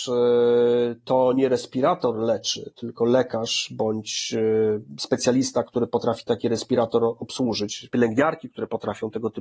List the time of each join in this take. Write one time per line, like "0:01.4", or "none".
0:07.9